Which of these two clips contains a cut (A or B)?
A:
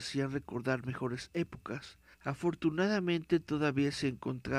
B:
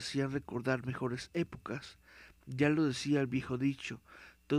A